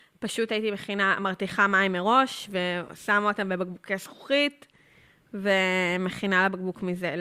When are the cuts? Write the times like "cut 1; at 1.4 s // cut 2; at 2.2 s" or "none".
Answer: none